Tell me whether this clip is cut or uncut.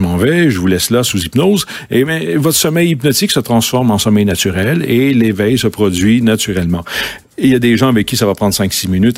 uncut